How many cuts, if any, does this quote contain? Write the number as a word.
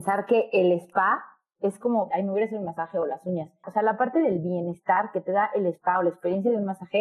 two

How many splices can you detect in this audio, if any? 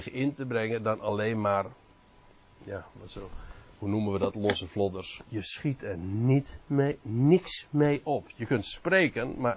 one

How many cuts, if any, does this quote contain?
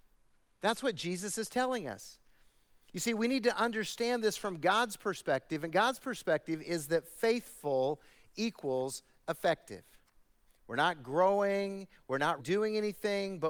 two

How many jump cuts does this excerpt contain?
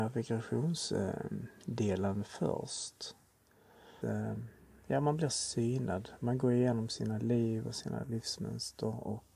one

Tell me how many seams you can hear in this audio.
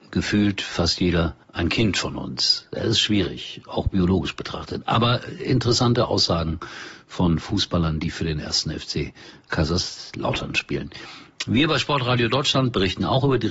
one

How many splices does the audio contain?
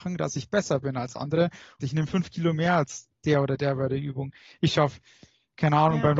one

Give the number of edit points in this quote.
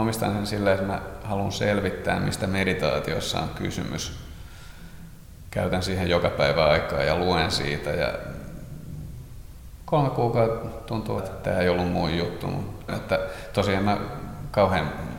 two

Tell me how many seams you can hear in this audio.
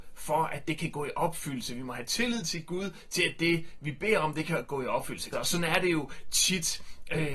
one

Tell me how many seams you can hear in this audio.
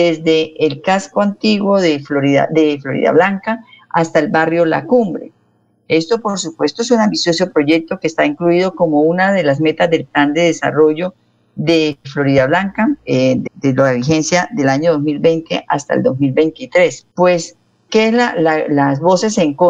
two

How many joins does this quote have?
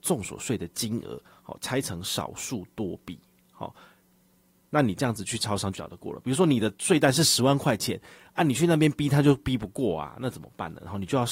one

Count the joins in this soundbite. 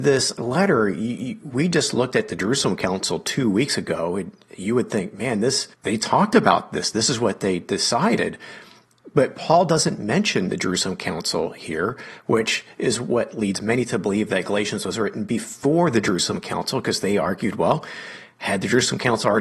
one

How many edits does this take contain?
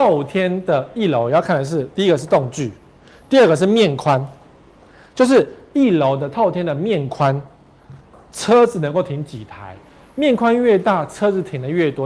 zero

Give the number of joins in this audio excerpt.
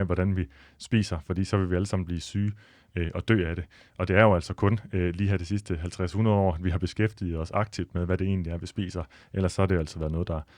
zero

